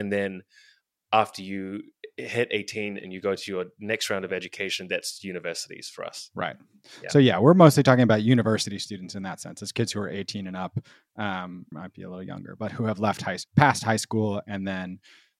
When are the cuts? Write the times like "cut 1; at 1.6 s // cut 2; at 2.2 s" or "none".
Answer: cut 1; at 11.7 s // cut 2; at 13.5 s

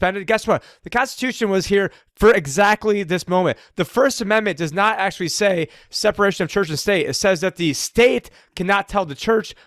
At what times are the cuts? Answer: none

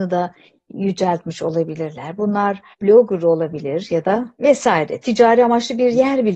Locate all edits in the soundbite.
cut 1; at 2.7 s // cut 2; at 4.3 s

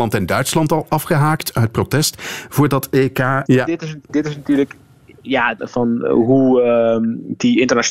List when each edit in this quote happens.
cut 1; at 3.5 s // cut 2; at 5.6 s

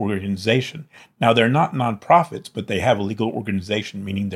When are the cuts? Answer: none

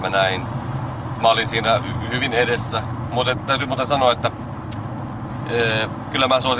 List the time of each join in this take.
none

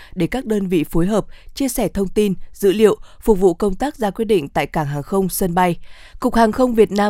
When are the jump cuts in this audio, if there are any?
cut 1; at 6.1 s

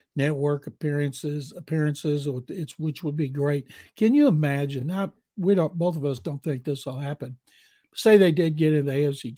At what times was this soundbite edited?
none

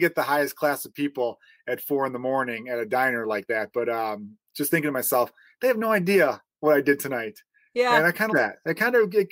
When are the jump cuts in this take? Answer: cut 1; at 8.3 s

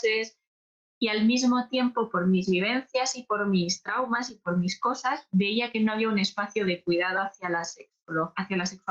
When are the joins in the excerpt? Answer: none

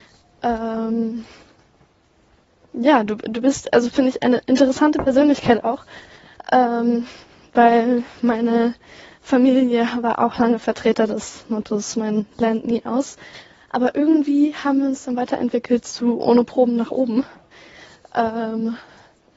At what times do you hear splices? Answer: none

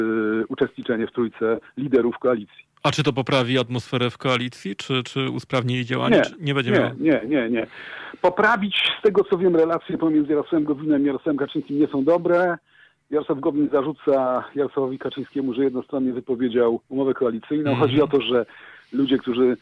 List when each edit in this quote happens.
none

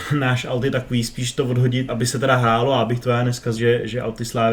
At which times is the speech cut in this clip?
cut 1; at 1.9 s // cut 2; at 3.6 s

